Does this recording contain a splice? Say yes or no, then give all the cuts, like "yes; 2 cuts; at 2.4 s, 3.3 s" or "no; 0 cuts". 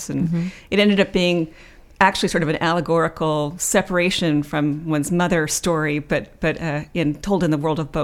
no; 0 cuts